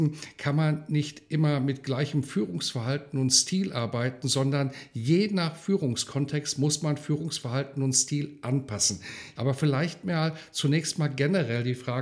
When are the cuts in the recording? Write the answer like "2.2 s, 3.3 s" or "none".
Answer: 9.3 s